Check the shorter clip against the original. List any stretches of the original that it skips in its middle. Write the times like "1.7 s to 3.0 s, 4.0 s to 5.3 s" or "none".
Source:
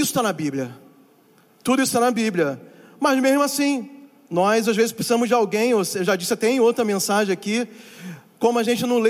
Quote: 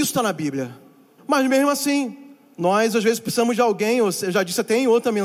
1.2 s to 2.9 s